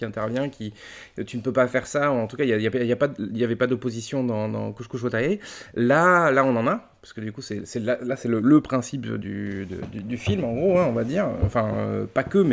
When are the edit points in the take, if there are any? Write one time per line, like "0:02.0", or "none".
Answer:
none